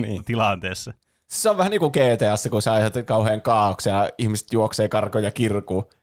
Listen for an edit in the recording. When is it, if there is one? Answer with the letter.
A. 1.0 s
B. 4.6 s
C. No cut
C